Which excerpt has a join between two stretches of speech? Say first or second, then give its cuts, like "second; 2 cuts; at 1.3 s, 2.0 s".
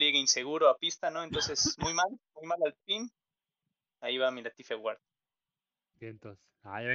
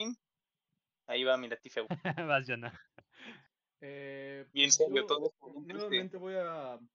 second; 1 cut; at 1.9 s